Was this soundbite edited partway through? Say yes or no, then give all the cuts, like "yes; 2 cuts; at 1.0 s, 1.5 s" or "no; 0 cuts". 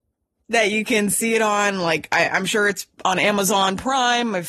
no; 0 cuts